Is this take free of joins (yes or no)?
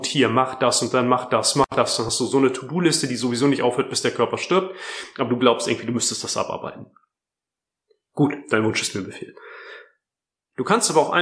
yes